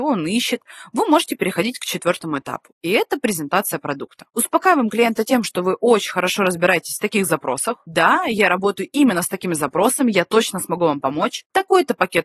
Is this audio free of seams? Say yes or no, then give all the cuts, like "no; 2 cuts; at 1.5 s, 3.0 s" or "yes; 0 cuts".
yes; 0 cuts